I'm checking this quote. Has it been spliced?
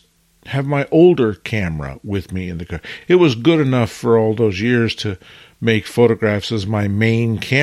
no; 0 cuts

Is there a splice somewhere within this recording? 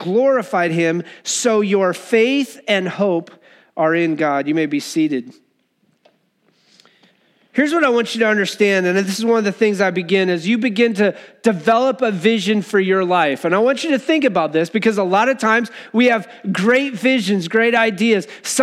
no; 0 cuts

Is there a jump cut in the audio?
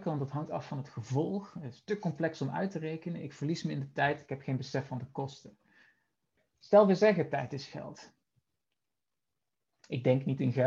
yes; 2 cuts; at 6.4 s, 8.5 s

